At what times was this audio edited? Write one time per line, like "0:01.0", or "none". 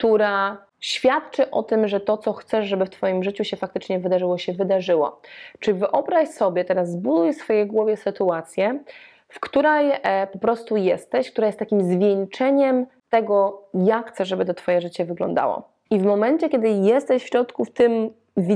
0:15.9